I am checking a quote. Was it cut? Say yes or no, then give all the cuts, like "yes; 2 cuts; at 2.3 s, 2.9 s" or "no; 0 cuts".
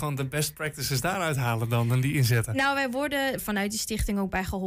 yes; 1 cut; at 3.4 s